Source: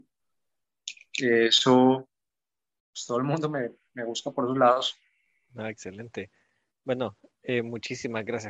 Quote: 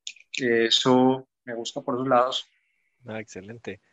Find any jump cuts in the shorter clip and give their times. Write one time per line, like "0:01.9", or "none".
0:01.5

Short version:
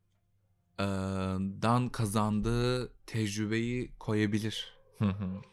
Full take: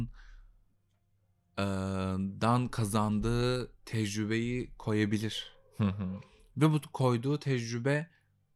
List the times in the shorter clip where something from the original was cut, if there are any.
none

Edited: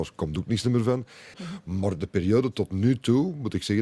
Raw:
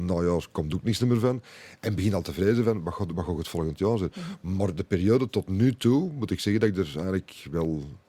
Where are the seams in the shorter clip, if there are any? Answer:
0:01.3

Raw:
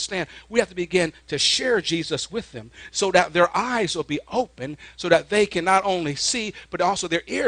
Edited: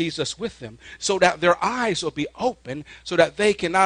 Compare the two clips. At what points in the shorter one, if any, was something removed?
none

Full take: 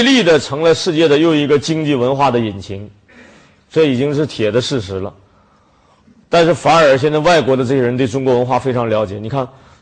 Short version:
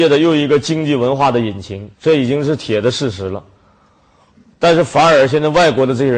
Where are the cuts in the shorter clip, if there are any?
0:01.9

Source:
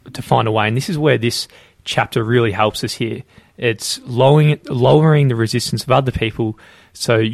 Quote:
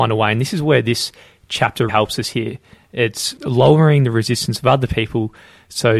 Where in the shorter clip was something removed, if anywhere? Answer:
0:01.9
0:03.4

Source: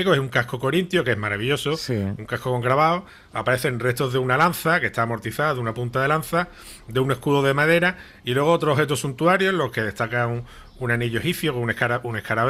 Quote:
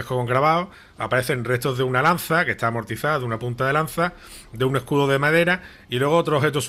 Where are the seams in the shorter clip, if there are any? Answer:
none

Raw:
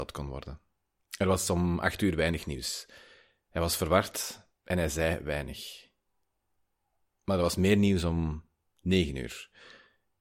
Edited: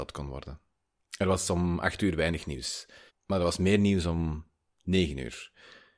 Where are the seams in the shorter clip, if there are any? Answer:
0:03.1

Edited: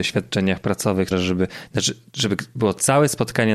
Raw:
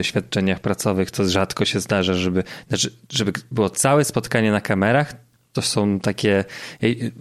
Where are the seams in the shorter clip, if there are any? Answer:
0:01.1

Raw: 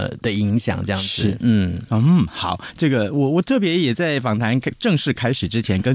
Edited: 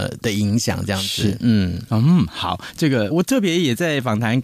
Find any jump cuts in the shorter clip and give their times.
0:03.1

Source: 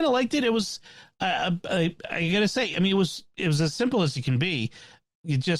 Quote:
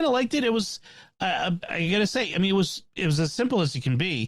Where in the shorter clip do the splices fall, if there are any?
0:01.6

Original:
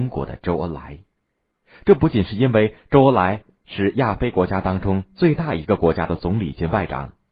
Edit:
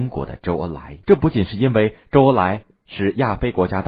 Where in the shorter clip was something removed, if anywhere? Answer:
0:01.0

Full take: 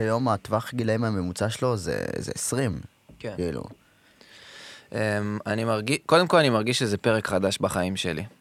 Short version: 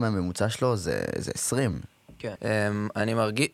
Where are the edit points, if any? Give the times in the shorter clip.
0:02.4

